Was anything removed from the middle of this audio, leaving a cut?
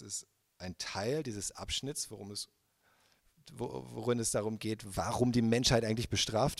no; 0 cuts

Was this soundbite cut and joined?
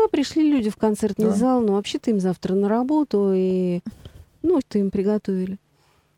yes; 1 cut; at 4.6 s

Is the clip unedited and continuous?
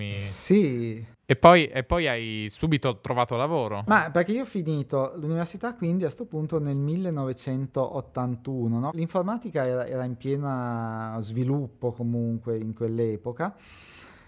yes; 0 cuts

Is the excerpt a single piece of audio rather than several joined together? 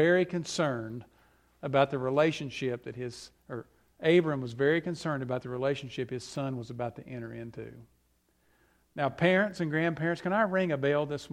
yes; 0 cuts

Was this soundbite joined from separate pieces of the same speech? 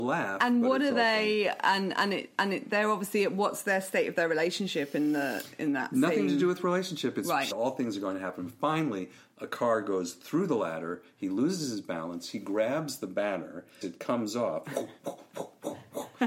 yes; 2 cuts; at 7.5 s, 13.8 s

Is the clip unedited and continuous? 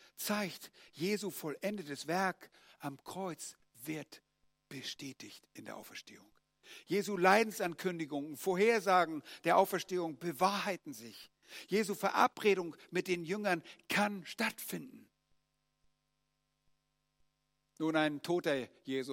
yes; 0 cuts

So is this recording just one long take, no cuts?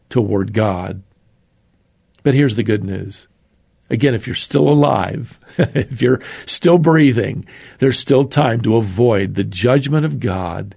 yes; 0 cuts

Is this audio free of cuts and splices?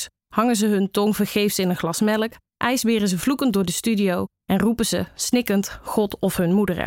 yes; 0 cuts

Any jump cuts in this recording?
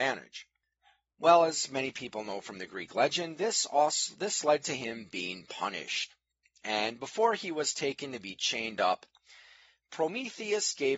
no; 0 cuts

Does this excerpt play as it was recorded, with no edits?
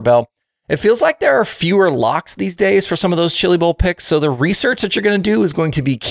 yes; 0 cuts

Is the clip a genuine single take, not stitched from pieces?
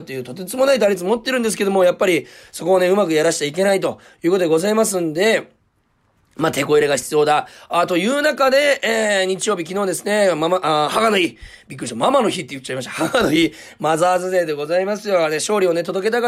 yes; 0 cuts

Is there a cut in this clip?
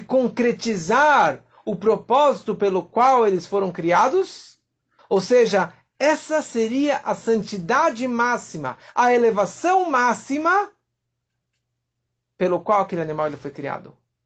yes; 1 cut; at 5.0 s

